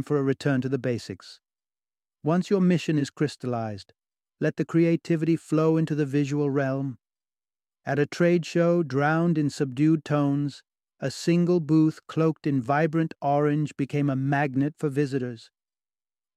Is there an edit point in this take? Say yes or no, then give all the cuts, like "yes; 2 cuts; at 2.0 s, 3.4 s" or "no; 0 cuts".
no; 0 cuts